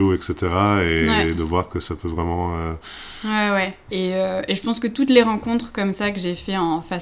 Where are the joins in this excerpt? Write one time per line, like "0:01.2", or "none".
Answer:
0:03.9

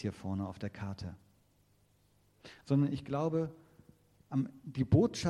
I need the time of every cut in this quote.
0:02.6

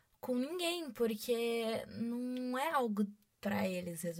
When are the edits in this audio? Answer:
none

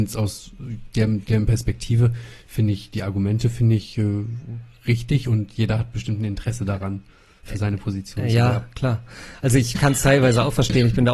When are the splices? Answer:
none

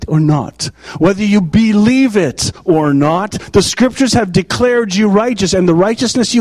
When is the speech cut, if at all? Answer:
none

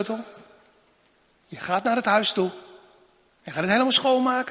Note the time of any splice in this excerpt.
none

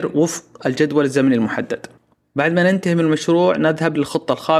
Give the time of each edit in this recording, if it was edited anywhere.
none

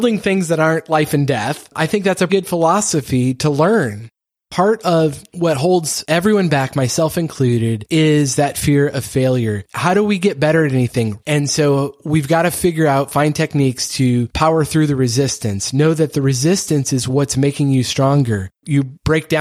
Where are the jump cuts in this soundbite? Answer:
0:02.3
0:11.2

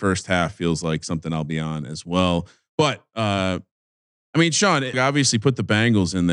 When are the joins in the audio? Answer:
0:04.9

